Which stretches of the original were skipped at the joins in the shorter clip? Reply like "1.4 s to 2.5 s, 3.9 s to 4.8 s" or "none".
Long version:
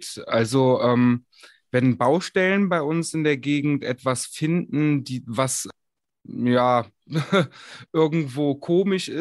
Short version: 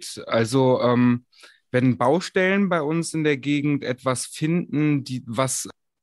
none